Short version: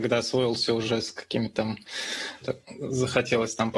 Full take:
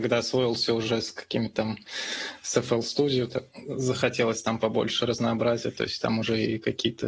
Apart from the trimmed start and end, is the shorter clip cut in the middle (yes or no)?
yes